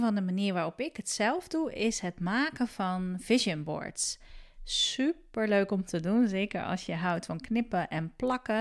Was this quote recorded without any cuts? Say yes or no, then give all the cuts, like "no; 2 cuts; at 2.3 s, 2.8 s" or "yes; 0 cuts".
yes; 0 cuts